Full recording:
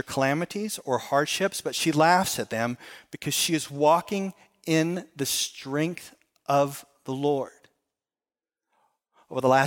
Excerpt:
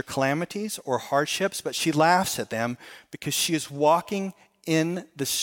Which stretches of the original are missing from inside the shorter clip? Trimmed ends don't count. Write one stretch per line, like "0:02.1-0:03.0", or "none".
none